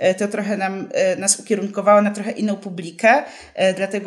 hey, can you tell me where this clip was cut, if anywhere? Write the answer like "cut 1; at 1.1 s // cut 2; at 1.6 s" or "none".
none